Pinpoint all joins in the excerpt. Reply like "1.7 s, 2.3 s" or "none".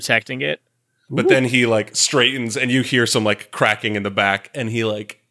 1.1 s